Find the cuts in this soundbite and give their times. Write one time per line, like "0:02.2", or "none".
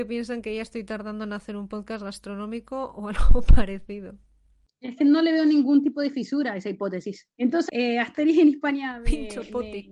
0:07.7